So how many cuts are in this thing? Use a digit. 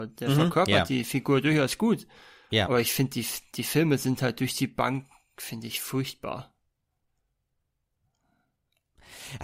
0